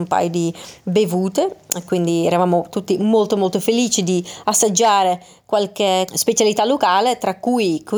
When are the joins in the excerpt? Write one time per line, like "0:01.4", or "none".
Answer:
0:06.1